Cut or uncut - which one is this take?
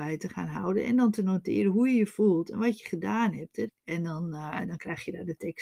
cut